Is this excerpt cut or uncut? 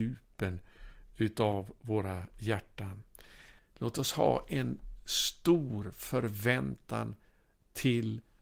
cut